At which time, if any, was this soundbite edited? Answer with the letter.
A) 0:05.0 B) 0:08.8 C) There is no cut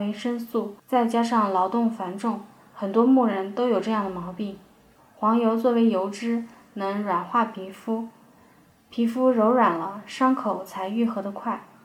A